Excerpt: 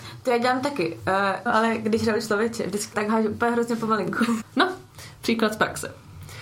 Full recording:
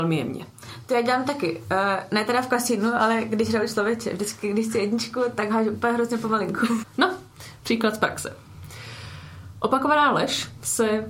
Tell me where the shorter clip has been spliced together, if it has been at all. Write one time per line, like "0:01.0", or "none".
0:01.5
0:02.9